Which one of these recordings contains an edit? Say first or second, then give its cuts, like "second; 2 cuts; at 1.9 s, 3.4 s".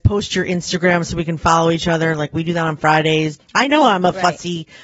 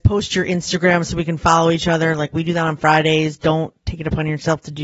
first; 1 cut; at 3.4 s